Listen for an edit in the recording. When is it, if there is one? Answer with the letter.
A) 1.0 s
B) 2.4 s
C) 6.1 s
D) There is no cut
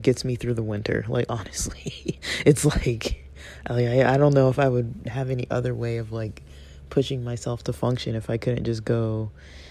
D